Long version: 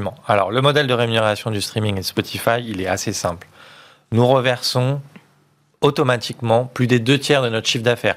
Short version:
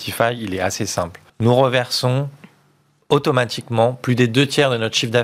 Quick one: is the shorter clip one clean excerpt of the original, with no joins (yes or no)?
no